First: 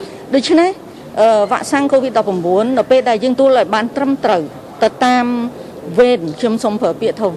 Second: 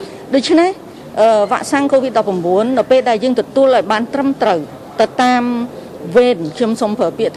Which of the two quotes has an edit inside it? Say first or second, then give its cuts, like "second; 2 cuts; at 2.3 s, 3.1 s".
first; 1 cut; at 3.4 s